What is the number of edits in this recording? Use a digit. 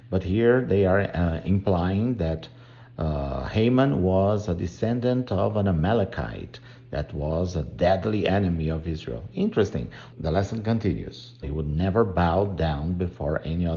2